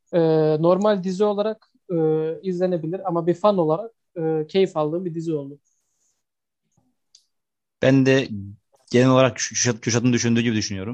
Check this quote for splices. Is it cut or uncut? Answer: cut